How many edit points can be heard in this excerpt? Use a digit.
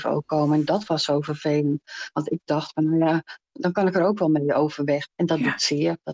2